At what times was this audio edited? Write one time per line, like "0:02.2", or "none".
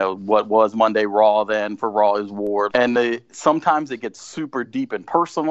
0:02.7